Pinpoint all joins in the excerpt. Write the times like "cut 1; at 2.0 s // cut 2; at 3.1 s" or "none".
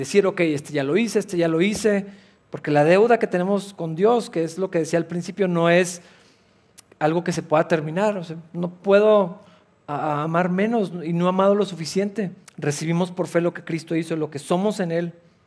cut 1; at 8.8 s // cut 2; at 12.4 s